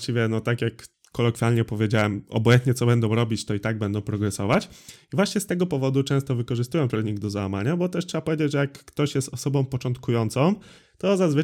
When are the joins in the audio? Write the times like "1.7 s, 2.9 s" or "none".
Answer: none